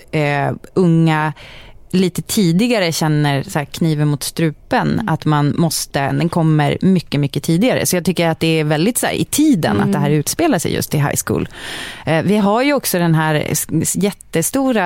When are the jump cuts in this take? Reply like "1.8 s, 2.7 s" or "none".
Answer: 6.1 s